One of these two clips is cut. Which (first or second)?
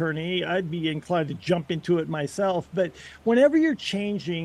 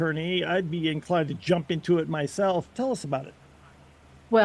second